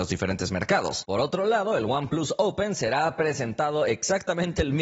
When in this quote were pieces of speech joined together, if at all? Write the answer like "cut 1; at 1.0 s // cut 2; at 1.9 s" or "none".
cut 1; at 1.0 s